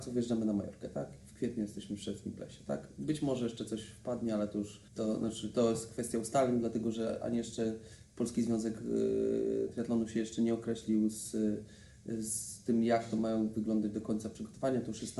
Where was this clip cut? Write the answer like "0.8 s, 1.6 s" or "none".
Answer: 4.9 s